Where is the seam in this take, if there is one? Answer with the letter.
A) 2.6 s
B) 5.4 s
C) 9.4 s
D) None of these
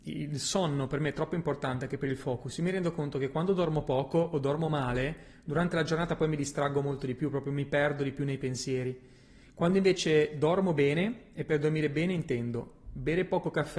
D